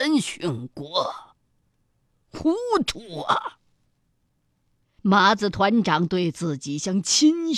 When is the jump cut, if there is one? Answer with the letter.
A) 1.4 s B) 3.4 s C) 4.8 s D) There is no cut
C